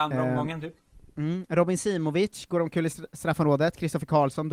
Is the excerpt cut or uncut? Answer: uncut